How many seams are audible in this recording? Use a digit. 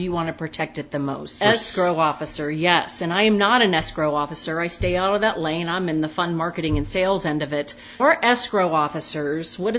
2